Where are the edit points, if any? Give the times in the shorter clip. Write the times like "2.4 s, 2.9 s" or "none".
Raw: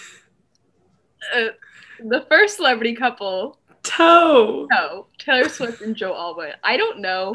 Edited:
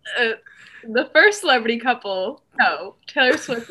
2.6 s

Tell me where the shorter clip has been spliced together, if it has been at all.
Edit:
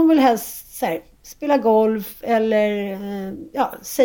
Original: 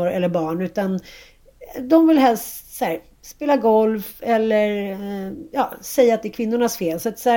none

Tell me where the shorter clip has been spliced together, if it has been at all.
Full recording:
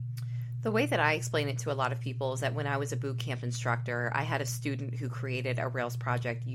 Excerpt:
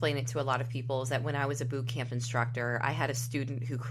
none

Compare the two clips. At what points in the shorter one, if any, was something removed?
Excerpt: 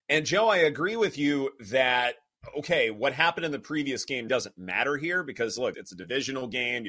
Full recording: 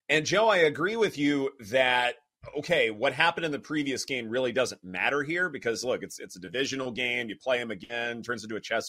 4.3 s, 5.7 s

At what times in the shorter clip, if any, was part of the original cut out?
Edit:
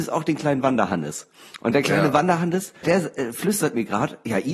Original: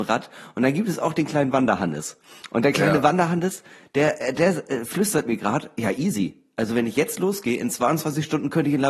2.8 s

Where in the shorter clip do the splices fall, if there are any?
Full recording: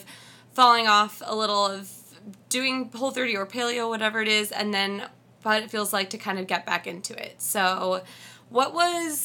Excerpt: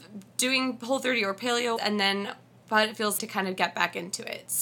1.8 s, 3.2 s

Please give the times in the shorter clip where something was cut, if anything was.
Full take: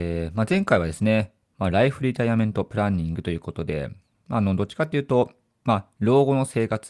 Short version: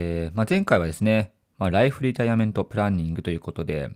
none

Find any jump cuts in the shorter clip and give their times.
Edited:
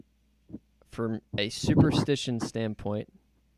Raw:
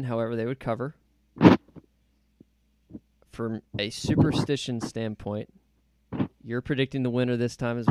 none

